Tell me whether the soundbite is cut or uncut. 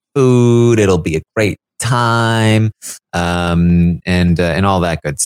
uncut